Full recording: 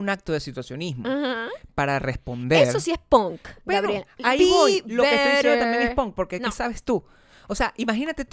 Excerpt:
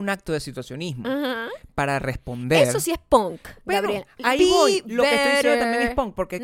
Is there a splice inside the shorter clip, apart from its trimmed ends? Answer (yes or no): no